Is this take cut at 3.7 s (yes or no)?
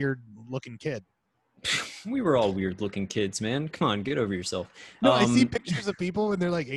no